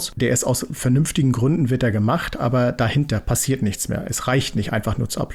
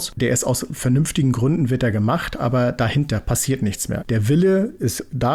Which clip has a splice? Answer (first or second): second